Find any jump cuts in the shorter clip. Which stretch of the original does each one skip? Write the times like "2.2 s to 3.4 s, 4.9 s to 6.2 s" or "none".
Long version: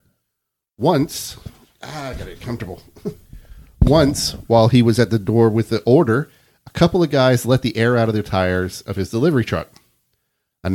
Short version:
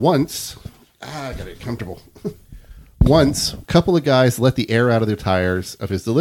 4.4 s to 6.7 s